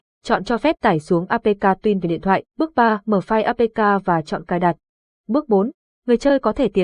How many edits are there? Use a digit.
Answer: 2